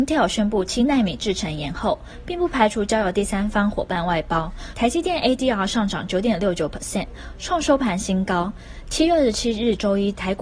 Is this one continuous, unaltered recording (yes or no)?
no